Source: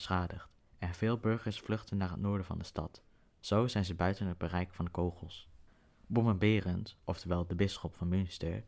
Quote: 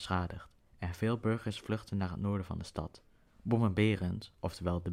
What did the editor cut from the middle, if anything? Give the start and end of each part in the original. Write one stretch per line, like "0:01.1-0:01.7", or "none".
0:03.3-0:05.9

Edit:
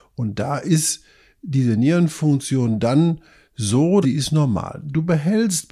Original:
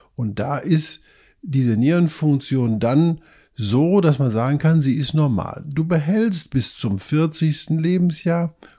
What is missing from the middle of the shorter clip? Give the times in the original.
0:04.0-0:04.8

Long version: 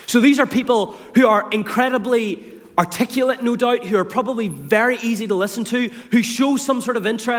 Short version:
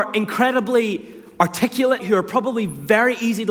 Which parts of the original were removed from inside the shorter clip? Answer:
0:03.4-0:03.8

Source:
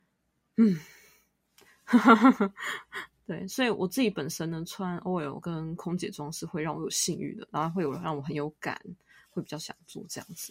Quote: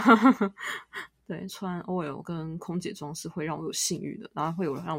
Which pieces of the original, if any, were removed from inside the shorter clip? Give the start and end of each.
0:03.5-0:04.7

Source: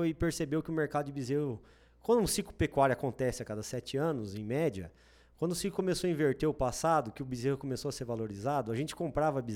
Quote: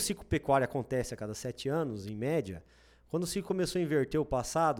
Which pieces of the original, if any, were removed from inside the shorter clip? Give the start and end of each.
none

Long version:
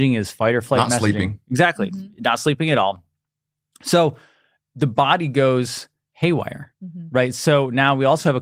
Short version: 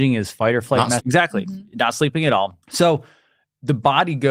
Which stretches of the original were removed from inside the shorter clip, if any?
0:01.0-0:01.4
0:03.1-0:03.8

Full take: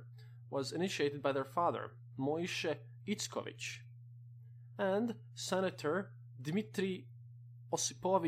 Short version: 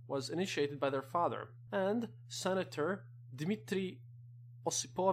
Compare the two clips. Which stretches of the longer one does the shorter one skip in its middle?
0:02.1-0:04.7

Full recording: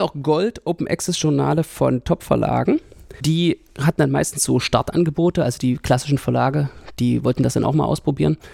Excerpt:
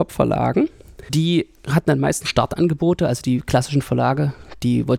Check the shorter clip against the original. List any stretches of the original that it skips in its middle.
0:04.4-0:04.6

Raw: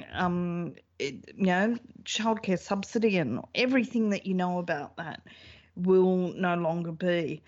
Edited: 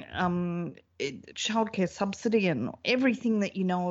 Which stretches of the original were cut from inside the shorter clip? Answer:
0:01.3-0:02.0

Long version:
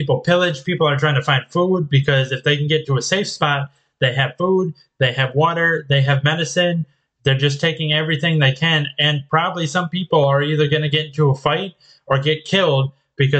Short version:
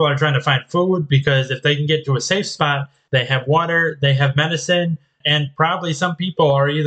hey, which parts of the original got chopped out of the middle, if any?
0:03.9-0:05.0
0:07.1-0:08.9

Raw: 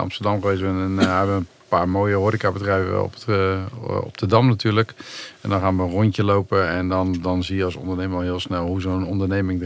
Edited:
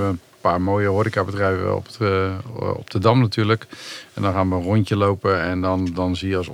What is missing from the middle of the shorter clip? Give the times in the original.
none

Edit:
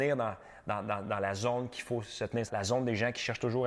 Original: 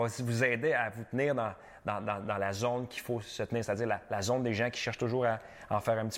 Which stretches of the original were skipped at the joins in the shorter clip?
0:03.7-0:04.1

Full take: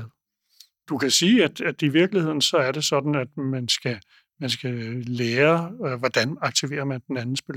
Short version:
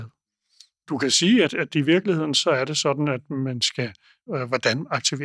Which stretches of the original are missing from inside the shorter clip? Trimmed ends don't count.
0:01.5-0:01.5
0:04.3-0:05.8

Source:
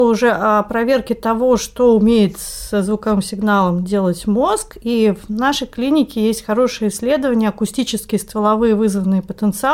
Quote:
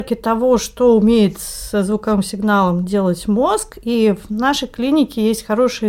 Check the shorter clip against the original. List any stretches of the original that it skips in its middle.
none

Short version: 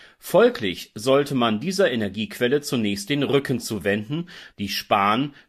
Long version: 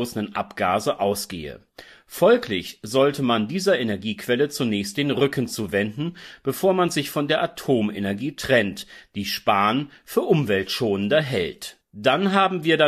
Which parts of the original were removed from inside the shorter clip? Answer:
0:06.4-0:09.1

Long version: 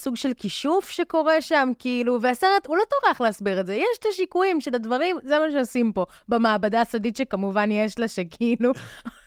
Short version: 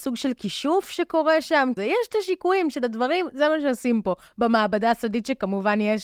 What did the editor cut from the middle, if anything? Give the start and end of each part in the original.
0:01.8-0:03.7

